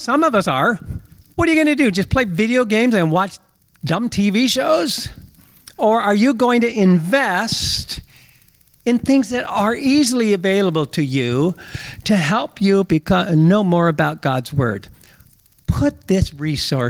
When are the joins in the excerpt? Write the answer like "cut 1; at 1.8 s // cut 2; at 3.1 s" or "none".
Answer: cut 1; at 1.3 s